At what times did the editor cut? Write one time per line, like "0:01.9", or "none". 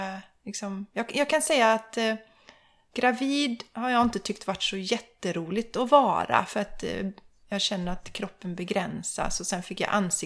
none